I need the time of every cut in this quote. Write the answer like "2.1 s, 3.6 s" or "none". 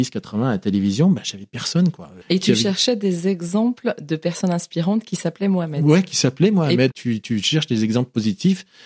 2.2 s, 6.9 s